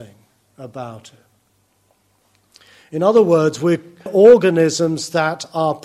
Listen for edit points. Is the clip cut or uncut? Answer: cut